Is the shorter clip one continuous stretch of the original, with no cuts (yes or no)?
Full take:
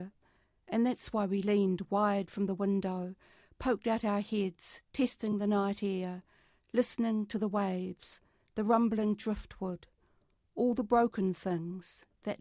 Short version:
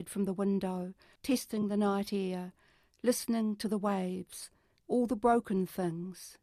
no